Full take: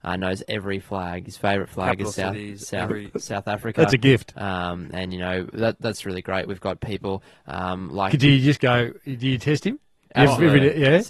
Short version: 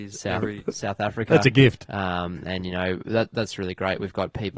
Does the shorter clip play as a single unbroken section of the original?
yes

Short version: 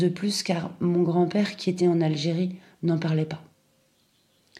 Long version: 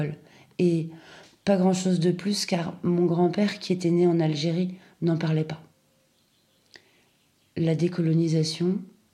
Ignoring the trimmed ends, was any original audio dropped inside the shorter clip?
yes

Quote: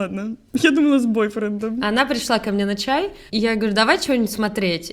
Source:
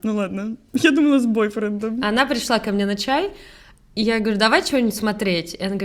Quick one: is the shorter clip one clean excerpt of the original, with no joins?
no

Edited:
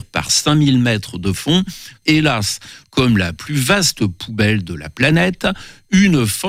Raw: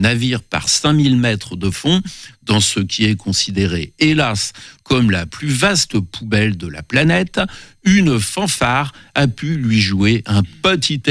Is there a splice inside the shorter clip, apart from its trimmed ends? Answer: yes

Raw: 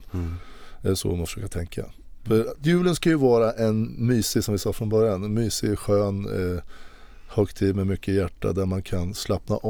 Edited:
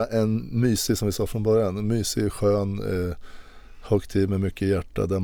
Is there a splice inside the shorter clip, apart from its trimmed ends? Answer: no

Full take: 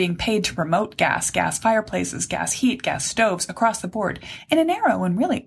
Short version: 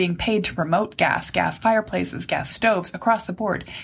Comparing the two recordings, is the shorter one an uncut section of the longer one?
no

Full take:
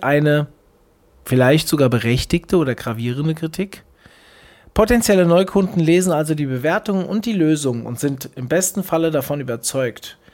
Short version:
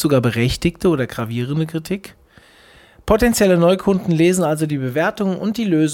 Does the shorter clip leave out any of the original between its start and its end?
no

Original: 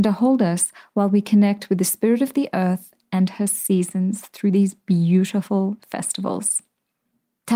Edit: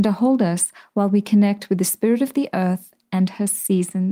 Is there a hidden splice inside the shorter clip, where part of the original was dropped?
no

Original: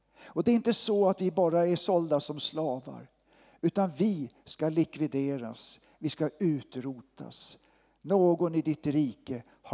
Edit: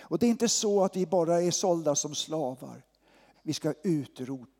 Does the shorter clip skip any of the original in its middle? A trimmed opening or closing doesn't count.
yes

